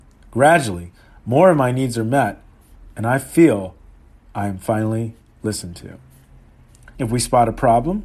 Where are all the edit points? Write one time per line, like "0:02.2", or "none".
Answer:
0:06.9